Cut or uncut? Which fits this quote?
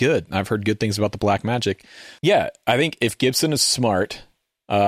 cut